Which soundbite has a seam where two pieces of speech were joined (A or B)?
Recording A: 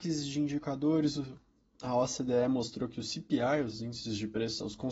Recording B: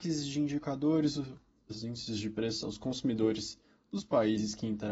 B